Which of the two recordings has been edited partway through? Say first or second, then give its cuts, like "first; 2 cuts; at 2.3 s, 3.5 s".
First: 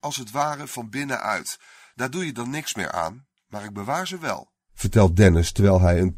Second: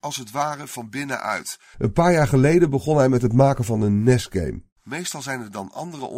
second; 2 cuts; at 1.7 s, 4.8 s